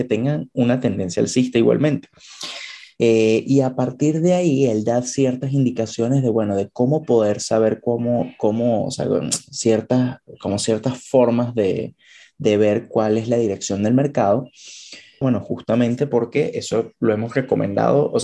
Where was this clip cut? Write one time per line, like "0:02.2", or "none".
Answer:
0:03.0
0:15.2